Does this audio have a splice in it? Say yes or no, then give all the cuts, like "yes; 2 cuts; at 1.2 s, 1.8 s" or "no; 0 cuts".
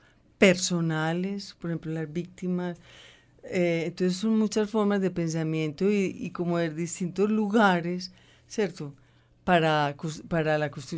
no; 0 cuts